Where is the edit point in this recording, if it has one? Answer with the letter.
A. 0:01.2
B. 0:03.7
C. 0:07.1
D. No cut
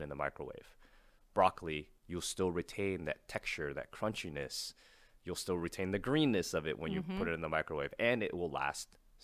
D